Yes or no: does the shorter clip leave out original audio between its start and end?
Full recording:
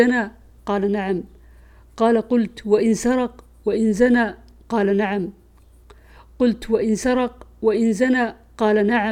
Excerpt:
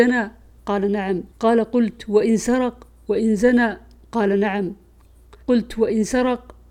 yes